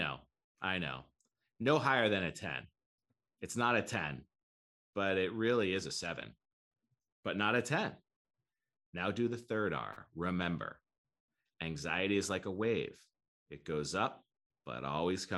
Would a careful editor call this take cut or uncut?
uncut